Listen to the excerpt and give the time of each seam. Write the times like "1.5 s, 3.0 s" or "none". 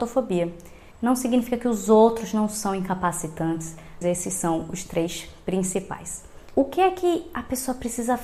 0.9 s, 4.0 s, 6.5 s

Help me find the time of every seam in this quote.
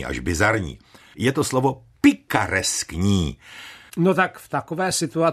1.1 s, 3.9 s

